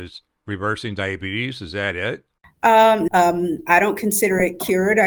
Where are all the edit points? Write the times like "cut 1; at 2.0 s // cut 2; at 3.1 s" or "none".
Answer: cut 1; at 3.1 s